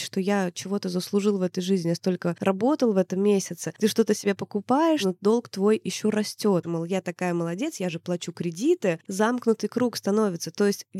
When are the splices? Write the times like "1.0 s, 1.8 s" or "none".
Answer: 6.6 s